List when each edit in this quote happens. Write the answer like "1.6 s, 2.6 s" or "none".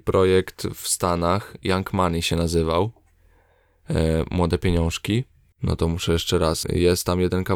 5.5 s, 6.6 s